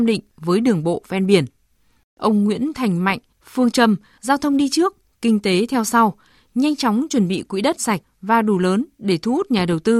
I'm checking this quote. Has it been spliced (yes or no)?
yes